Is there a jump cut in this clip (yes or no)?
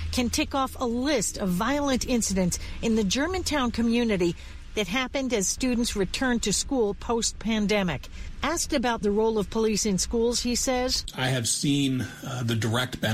no